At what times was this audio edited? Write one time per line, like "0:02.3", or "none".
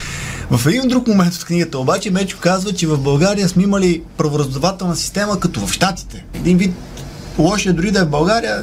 0:06.3